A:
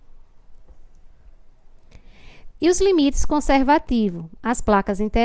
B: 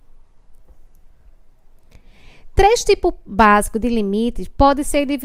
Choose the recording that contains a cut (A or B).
A